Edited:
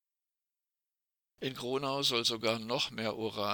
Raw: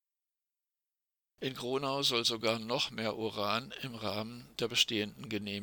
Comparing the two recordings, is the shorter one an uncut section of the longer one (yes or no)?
yes